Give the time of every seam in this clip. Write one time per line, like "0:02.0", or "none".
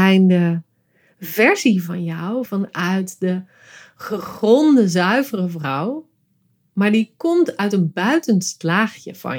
0:02.5